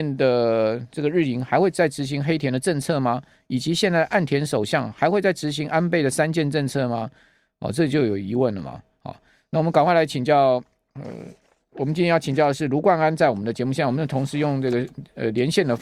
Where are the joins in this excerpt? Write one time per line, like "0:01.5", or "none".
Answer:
none